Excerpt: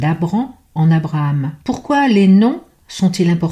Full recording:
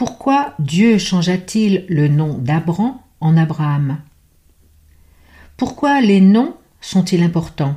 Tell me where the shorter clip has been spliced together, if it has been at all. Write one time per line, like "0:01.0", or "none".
0:01.6

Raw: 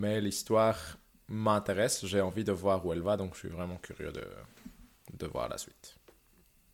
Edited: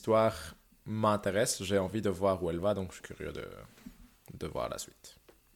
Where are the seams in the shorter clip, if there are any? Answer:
0:03.0

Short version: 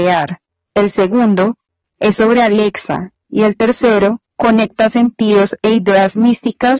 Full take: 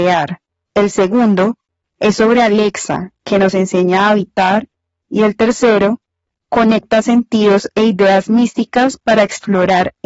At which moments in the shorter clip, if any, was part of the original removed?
0:03.1
0:04.3

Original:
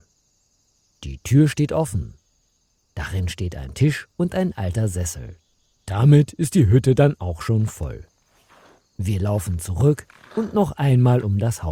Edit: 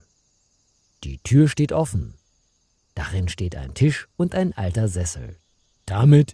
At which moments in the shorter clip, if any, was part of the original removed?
none

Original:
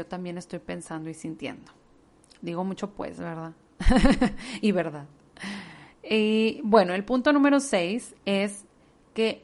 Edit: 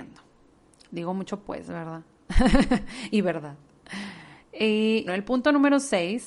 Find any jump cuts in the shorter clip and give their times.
0:05.1

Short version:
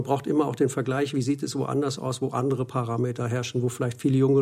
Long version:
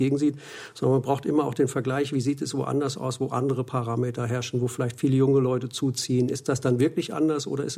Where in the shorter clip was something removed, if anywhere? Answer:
none

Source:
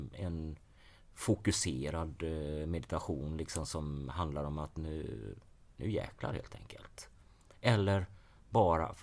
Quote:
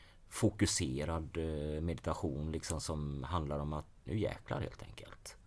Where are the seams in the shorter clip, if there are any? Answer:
0:03.9

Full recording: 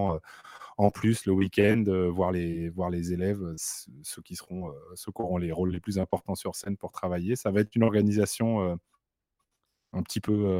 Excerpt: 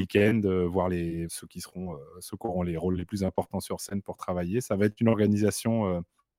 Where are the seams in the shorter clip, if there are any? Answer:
0:01.3

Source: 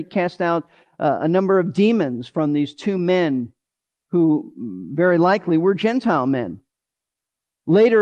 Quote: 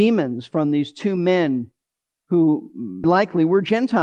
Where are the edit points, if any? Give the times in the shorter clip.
0:03.0

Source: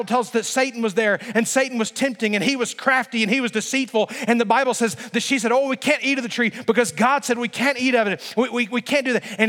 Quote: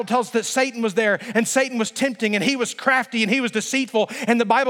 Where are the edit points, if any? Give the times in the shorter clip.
none

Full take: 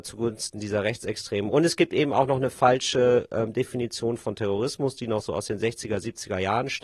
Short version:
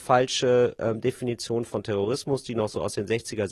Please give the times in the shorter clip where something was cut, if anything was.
none

